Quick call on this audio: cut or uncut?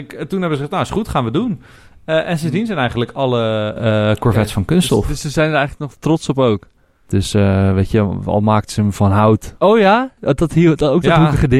cut